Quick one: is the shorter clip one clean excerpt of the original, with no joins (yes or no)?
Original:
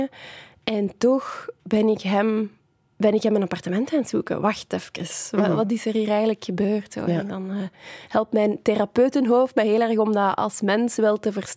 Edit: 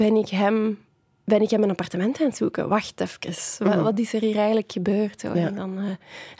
yes